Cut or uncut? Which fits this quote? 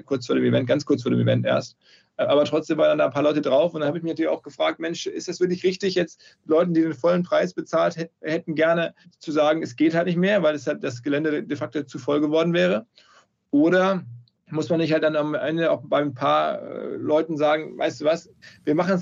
uncut